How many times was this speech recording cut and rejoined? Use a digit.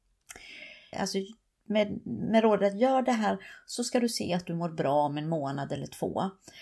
1